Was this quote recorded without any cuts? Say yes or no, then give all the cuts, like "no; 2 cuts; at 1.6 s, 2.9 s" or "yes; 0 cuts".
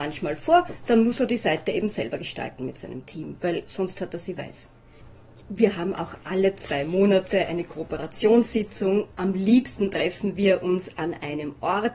yes; 0 cuts